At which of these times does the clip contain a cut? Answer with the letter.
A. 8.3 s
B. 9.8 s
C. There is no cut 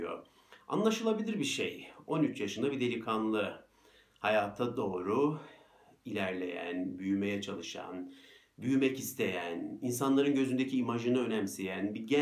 C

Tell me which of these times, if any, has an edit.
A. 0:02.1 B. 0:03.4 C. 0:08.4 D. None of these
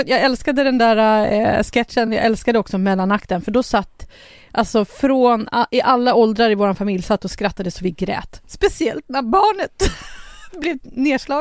D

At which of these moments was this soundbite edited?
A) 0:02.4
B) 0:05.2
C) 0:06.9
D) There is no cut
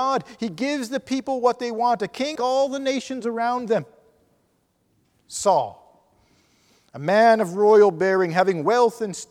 A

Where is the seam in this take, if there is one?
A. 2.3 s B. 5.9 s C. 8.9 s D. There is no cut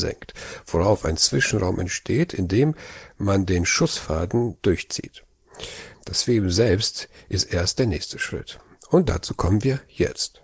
B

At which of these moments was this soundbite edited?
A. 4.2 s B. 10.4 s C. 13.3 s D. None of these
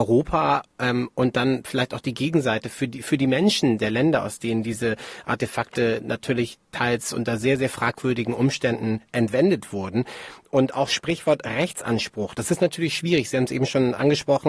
D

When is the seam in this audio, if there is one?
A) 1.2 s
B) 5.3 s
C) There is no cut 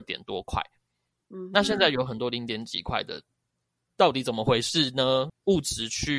B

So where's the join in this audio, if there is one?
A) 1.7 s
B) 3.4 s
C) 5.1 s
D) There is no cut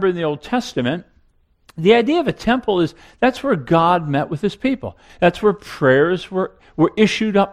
C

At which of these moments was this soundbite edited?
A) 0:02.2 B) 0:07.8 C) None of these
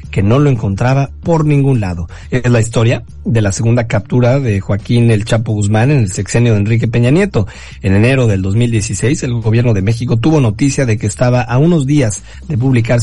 A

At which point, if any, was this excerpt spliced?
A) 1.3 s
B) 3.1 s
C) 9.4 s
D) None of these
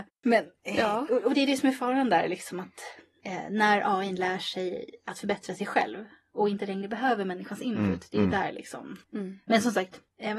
A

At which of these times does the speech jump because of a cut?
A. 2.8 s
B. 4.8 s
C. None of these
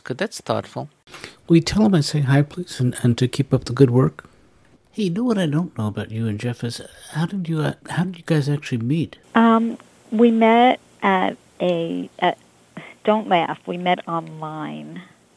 C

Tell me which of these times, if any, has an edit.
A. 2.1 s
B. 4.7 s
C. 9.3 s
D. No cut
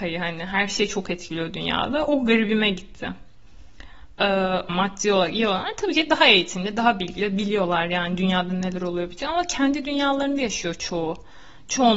B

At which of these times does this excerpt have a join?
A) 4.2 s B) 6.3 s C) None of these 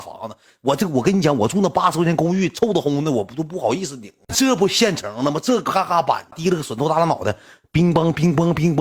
B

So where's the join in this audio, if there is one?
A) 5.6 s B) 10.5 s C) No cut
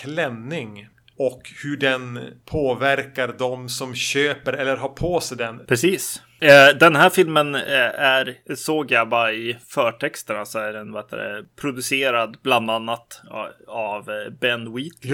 A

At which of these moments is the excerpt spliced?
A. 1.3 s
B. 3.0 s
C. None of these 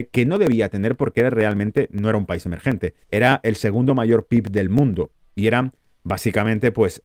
B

